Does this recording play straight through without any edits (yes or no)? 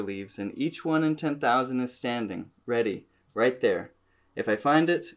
yes